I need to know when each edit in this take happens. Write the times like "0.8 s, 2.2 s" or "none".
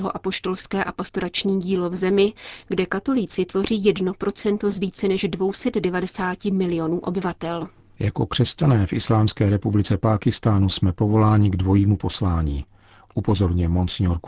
none